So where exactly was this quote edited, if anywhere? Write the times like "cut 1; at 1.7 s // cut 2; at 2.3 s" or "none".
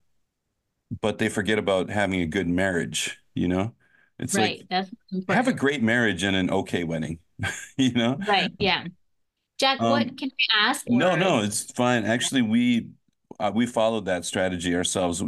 cut 1; at 8.6 s // cut 2; at 10.8 s